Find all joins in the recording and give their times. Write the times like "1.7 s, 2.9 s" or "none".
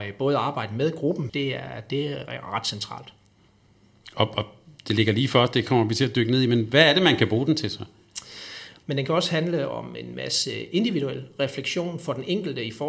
1.3 s, 8.8 s